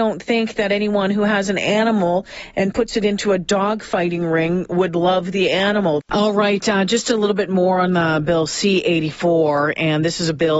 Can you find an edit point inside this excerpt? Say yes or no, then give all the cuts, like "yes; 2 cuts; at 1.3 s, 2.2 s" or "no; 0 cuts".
yes; 1 cut; at 6.0 s